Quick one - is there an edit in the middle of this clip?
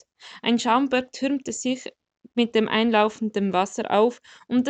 no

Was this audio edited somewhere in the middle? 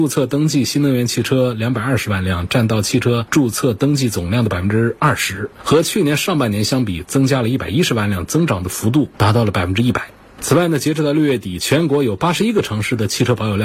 no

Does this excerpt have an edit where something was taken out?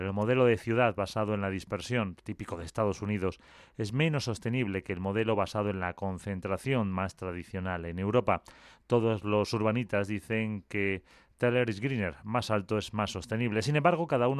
no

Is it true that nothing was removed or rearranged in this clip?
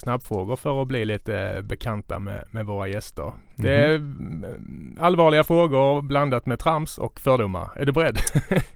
yes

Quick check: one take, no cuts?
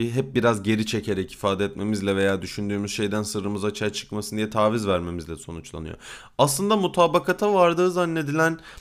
yes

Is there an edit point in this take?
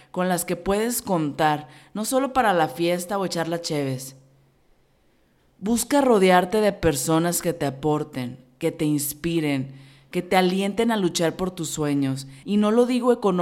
yes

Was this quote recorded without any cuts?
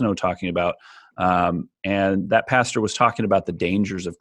yes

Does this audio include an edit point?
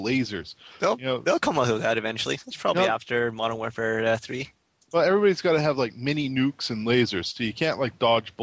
no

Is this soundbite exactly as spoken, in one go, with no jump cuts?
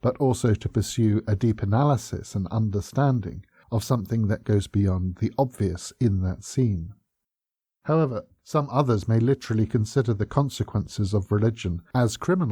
yes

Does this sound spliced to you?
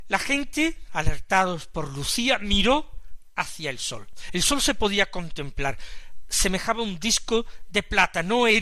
no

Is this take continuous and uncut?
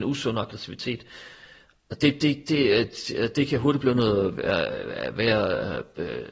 yes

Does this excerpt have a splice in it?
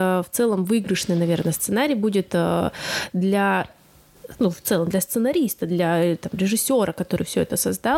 no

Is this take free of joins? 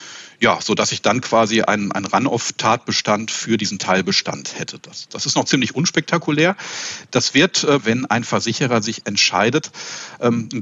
no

